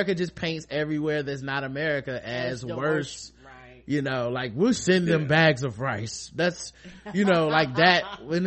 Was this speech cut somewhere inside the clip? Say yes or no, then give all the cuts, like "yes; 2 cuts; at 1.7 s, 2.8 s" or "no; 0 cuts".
no; 0 cuts